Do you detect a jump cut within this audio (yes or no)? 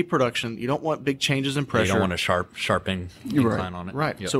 no